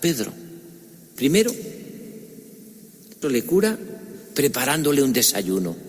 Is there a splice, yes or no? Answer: yes